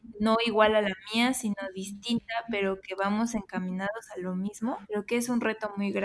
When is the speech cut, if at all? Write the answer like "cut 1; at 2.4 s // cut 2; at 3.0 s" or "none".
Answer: cut 1; at 4.8 s